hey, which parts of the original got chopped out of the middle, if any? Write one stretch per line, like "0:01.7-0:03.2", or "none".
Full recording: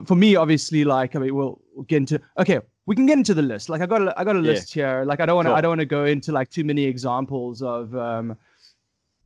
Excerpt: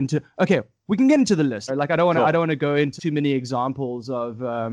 0:03.7-0:05.0
0:06.3-0:06.5